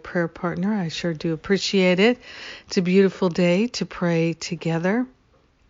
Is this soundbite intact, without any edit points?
yes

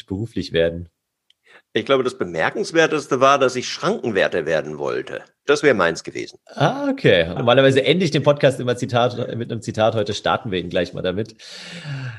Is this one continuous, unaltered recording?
no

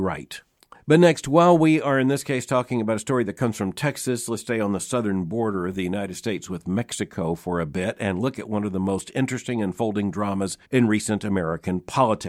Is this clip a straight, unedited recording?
no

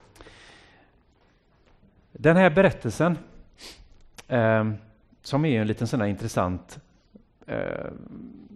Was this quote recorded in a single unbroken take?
yes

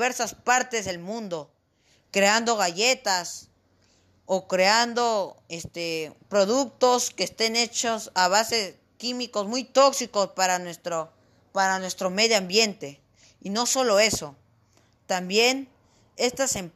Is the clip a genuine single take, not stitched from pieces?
yes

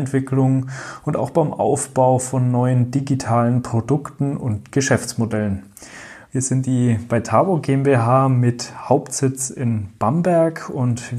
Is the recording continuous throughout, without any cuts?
no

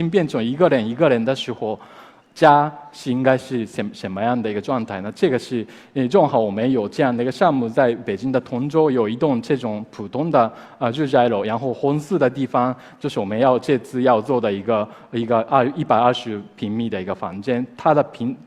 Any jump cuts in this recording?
no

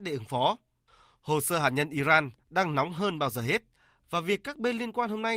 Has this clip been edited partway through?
no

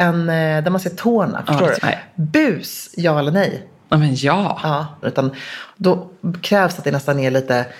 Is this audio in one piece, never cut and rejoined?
no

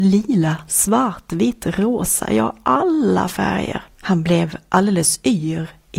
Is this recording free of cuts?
no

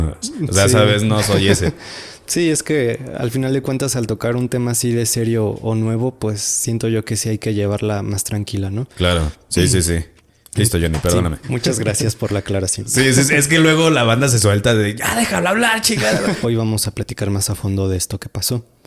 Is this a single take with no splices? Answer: no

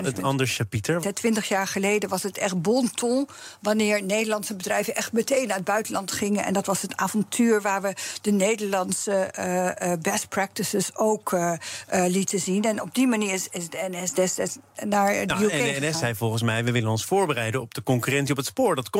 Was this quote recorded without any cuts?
no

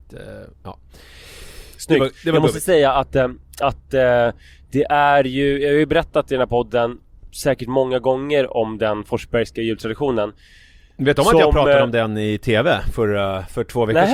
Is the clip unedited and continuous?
yes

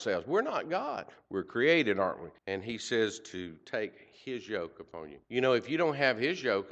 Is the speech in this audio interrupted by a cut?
yes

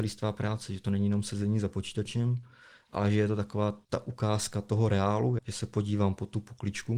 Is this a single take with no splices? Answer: no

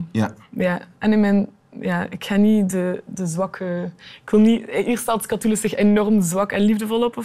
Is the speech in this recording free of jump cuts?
yes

